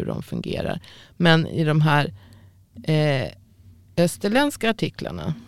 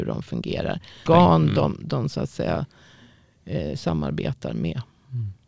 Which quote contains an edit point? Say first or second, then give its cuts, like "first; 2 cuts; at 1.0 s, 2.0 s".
second; 1 cut; at 1.1 s